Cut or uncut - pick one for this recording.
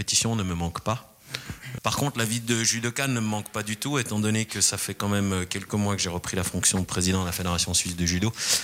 cut